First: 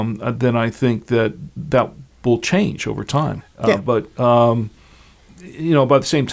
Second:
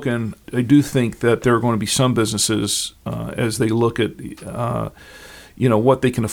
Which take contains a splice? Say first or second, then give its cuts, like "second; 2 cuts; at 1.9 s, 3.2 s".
first; 1 cut; at 3.4 s